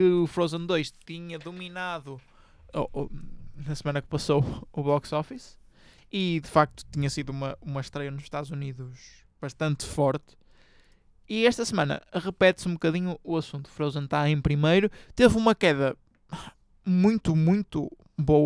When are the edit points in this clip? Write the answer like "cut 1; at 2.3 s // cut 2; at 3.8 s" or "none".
none